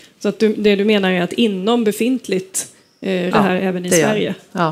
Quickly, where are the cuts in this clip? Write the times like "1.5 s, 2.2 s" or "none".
3.3 s